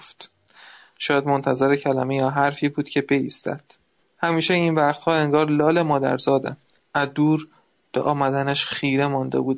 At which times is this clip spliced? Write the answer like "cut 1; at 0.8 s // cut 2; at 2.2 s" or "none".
cut 1; at 4.0 s // cut 2; at 6.8 s